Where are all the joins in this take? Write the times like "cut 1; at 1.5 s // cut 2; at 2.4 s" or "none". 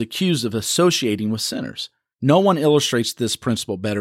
cut 1; at 2.1 s